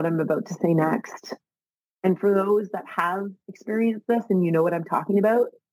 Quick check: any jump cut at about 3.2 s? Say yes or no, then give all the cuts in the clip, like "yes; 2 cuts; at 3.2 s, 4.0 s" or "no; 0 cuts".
no; 1 cut; at 1.9 s